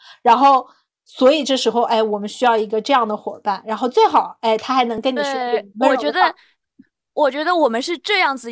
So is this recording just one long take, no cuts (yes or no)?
yes